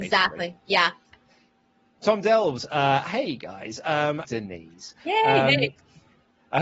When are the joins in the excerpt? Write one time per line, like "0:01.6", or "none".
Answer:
0:04.2